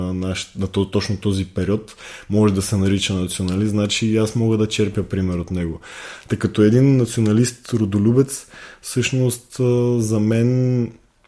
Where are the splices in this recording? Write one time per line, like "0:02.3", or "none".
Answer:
none